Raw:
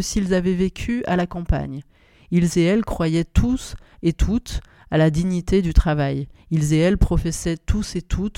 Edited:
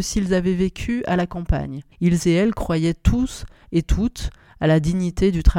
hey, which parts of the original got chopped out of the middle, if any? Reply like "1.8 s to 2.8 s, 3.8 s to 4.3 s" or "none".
1.9 s to 2.2 s